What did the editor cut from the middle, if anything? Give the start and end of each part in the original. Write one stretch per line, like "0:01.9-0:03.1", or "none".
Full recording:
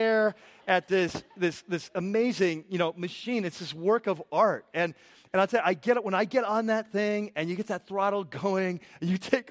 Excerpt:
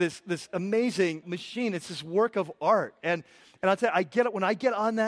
0:02.6-0:02.9